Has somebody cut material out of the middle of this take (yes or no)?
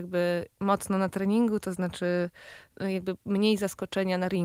no